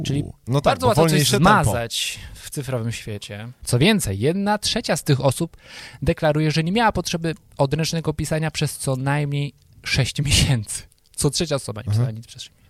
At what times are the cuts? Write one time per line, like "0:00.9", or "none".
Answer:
0:03.6